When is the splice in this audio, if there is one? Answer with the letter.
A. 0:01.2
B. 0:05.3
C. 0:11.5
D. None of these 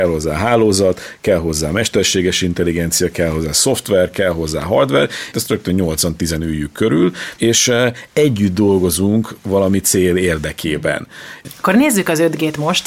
B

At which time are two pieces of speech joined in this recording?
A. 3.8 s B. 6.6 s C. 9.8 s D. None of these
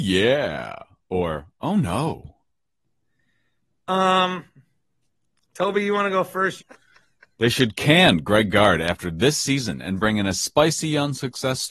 B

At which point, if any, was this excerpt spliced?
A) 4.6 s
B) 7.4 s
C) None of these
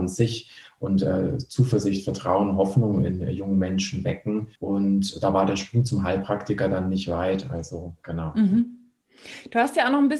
A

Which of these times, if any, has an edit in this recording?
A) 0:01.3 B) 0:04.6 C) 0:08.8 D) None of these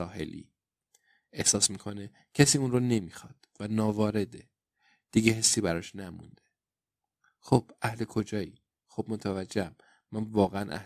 C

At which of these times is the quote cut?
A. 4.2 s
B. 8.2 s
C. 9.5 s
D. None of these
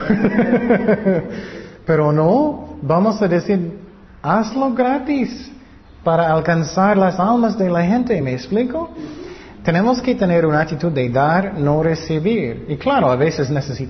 D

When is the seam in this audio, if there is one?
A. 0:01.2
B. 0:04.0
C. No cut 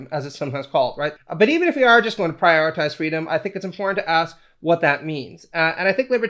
A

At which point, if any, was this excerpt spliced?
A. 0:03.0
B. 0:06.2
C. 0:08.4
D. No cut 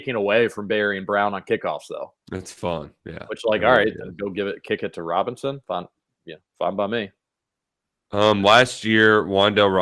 D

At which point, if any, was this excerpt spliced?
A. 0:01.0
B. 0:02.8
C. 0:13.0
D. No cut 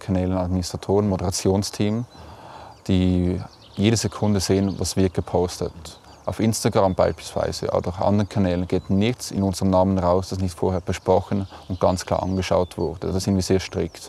D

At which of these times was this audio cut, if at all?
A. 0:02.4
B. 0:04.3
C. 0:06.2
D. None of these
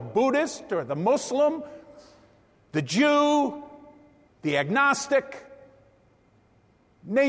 B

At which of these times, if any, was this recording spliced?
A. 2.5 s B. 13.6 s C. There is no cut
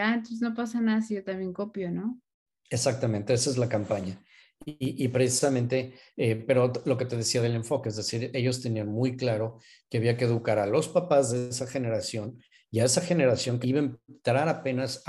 B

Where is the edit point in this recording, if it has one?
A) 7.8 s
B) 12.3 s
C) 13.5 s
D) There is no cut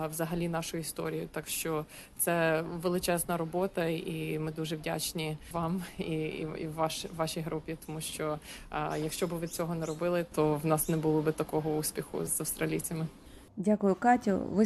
B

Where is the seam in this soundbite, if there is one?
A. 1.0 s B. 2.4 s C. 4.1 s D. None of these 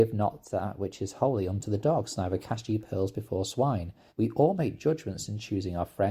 C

